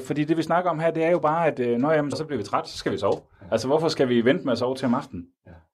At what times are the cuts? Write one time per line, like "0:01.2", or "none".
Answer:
0:02.1